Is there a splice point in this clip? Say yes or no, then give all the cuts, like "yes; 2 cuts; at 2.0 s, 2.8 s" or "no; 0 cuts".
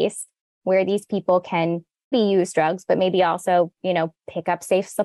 yes; 1 cut; at 2.1 s